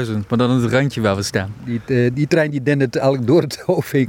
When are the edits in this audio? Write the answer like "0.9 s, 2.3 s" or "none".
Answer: 2.1 s